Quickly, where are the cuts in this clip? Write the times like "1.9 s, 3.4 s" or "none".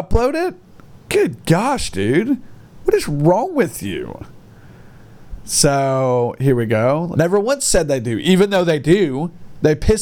7.1 s